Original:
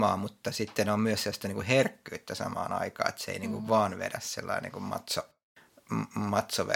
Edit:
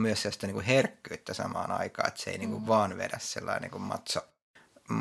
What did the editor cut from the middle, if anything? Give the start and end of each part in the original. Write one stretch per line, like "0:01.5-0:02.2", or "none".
none